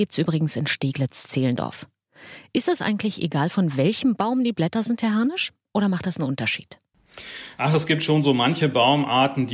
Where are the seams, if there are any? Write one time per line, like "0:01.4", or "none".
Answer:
none